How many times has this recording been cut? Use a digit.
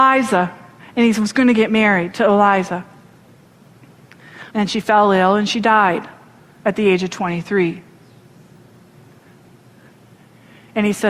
1